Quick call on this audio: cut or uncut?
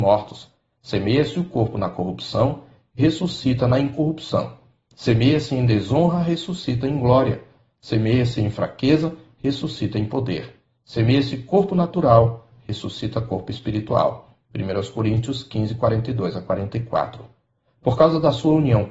uncut